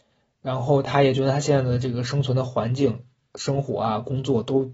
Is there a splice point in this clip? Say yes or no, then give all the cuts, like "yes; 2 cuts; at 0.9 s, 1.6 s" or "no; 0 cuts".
no; 0 cuts